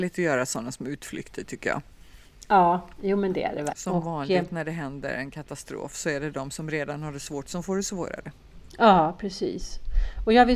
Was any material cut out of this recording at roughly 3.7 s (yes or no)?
yes